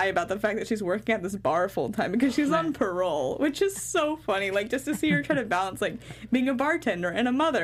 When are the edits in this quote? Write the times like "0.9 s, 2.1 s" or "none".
none